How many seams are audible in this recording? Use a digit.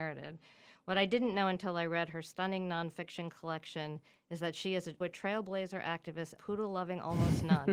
2